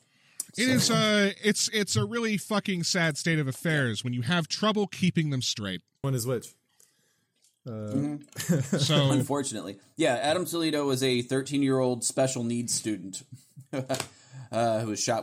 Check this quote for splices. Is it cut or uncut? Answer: cut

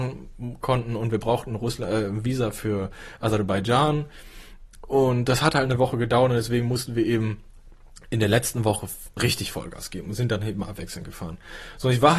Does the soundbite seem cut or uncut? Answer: uncut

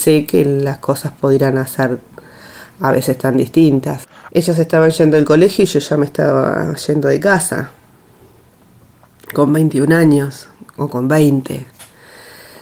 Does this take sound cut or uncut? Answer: cut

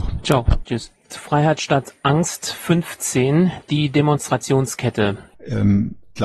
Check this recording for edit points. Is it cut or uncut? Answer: cut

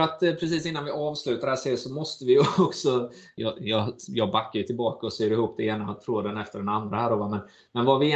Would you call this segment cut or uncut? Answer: uncut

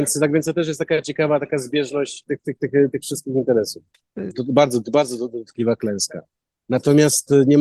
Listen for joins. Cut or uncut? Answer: cut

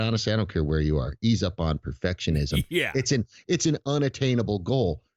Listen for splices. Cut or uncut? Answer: uncut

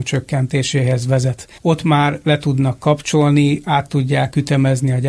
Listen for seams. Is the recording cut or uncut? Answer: cut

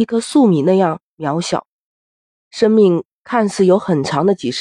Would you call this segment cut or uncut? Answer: uncut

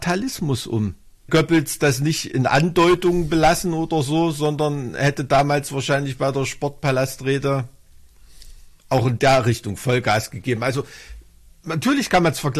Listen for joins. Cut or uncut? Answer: cut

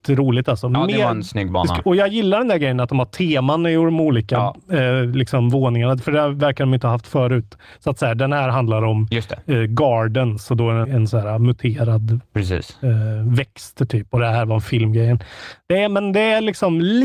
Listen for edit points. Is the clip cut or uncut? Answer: cut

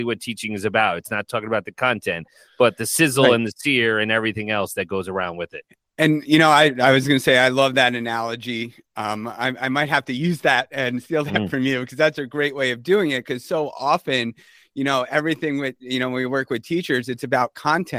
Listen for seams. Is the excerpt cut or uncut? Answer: uncut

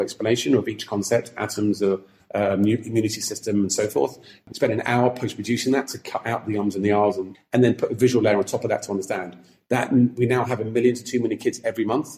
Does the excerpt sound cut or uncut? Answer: cut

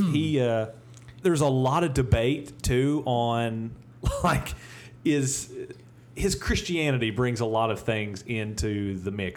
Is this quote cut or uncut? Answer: cut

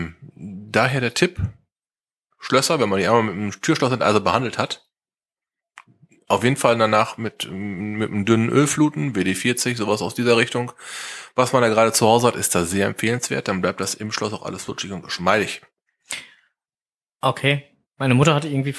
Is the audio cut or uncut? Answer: uncut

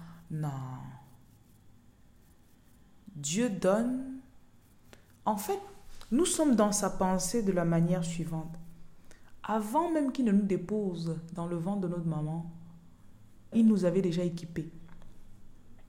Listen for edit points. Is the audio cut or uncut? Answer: cut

